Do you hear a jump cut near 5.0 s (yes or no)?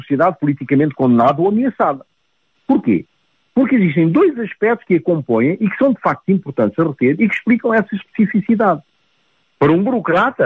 no